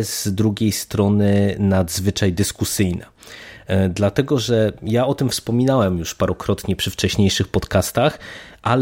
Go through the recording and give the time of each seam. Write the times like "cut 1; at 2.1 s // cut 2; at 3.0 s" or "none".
none